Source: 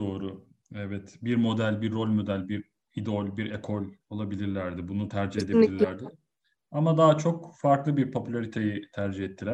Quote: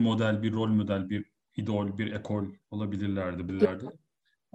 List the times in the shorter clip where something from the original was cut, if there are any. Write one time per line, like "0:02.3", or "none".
0:03.5